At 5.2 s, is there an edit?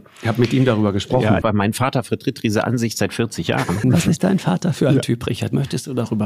no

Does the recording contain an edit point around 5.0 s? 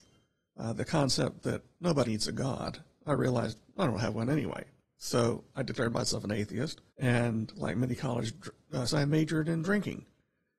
no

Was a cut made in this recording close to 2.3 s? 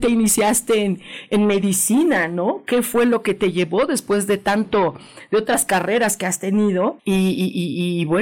no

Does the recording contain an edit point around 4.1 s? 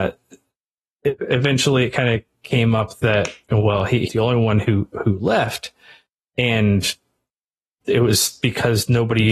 yes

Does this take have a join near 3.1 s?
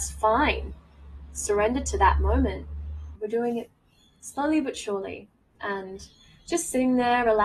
yes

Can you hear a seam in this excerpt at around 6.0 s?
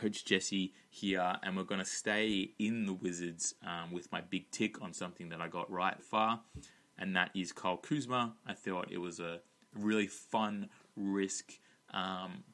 yes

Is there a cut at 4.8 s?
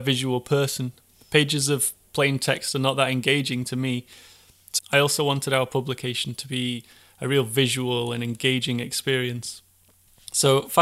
yes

